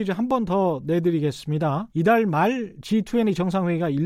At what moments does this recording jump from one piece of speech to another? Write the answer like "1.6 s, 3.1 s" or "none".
1.9 s